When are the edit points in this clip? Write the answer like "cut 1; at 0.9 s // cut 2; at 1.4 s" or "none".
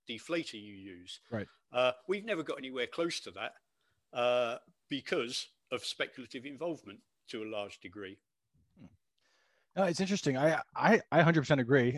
none